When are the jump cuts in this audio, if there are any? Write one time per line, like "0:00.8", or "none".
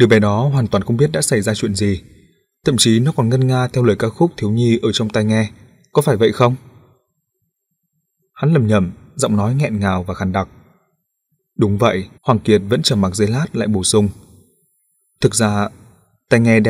0:12.2